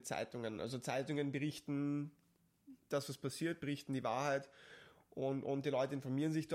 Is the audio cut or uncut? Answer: uncut